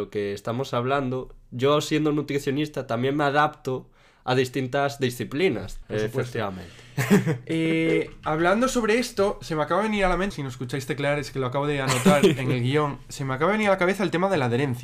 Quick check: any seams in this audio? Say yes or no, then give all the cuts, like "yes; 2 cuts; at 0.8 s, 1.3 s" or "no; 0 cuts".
yes; 2 cuts; at 5.8 s, 10.3 s